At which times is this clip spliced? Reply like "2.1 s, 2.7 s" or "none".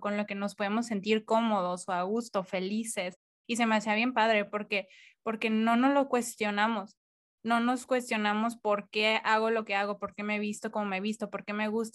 none